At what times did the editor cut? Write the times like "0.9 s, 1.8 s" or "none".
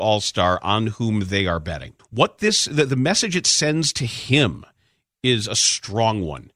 2.0 s

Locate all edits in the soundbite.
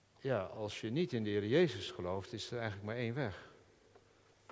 none

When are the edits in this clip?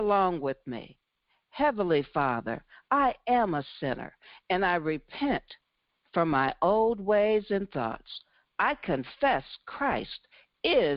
none

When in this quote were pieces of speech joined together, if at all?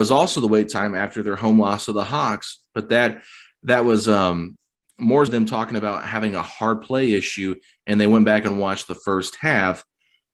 5.3 s

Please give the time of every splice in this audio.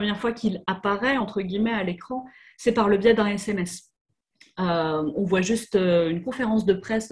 none

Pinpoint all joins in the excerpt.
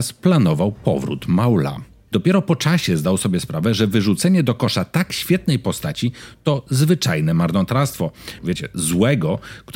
2.1 s, 8.4 s

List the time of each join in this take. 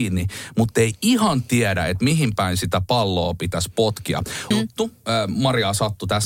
4.5 s

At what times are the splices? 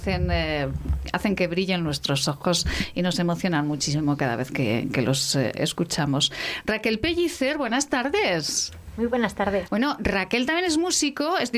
9.7 s

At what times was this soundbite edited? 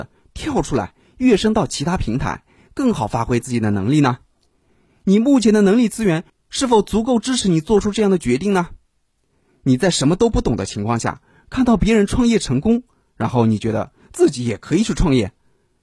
none

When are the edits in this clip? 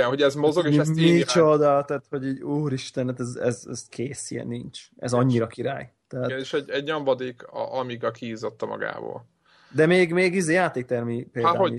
none

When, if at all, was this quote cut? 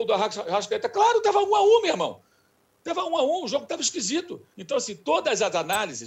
4.5 s

